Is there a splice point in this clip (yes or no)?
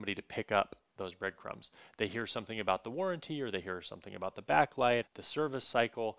yes